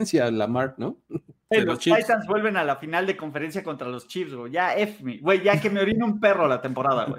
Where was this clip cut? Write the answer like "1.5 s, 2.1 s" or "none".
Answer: 1.5 s